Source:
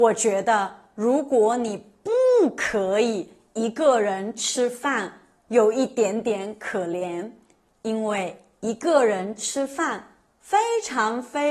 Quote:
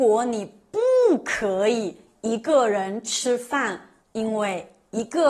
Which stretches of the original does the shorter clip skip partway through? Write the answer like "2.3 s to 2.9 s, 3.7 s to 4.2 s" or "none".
5.3 s to 7.7 s